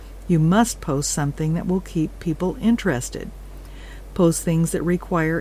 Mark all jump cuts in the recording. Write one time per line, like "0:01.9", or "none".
0:04.1